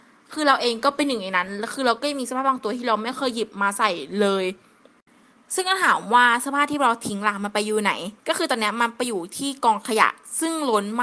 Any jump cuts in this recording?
yes; 1 cut; at 8.2 s

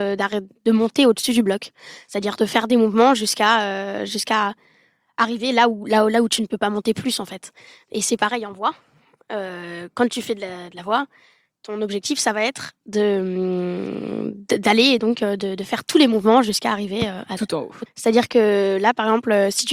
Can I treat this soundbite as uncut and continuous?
no; 2 cuts; at 15.0 s, 17.9 s

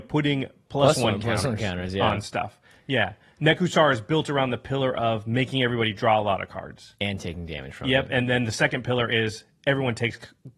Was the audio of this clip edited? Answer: no; 0 cuts

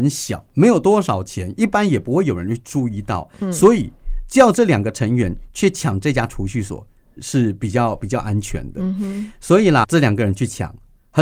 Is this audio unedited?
no; 2 cuts; at 7.2 s, 9.8 s

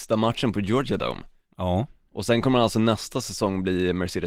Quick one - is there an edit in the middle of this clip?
no; 0 cuts

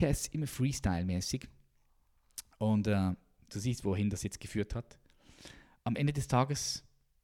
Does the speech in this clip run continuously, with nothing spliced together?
yes; 0 cuts

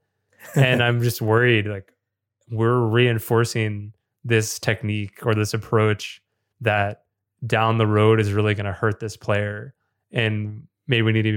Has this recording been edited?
no; 0 cuts

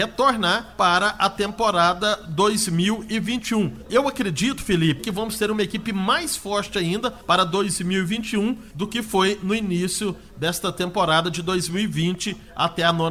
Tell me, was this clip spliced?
yes; 2 cuts; at 3.8 s, 5.0 s

